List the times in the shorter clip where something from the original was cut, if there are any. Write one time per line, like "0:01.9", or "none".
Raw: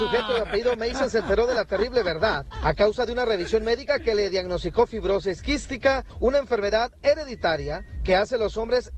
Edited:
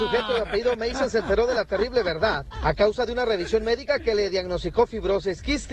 none